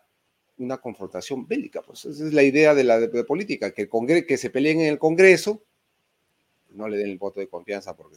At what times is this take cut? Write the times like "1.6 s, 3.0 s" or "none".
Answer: none